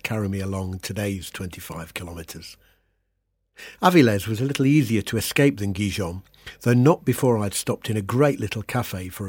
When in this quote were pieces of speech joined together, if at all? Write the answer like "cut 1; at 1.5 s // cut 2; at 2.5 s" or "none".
none